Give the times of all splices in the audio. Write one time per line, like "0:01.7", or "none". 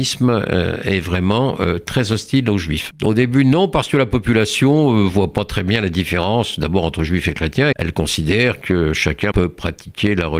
0:02.9
0:07.7
0:09.3

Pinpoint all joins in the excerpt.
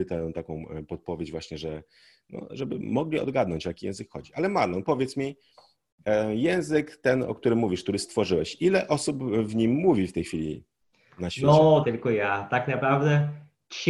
0:11.8

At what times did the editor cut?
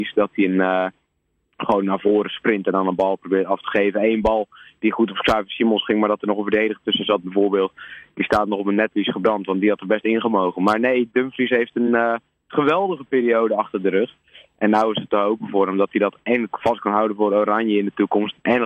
none

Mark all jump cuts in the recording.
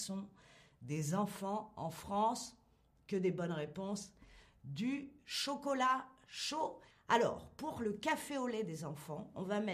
0:06.9

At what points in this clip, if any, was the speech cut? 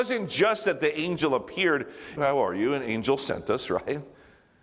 0:02.2

